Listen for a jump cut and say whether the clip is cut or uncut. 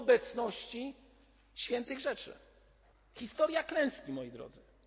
cut